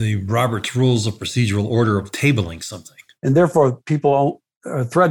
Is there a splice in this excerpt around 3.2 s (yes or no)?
yes